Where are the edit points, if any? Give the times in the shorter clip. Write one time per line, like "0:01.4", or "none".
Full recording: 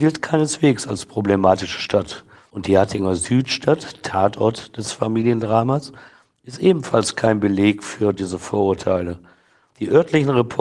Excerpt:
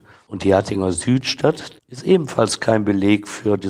0:01.8